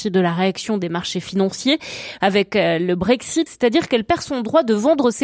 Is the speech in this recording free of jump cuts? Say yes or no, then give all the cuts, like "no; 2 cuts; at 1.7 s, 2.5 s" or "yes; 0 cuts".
no; 2 cuts; at 2.2 s, 3.5 s